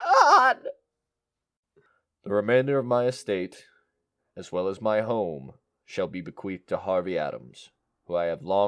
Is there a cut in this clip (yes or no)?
yes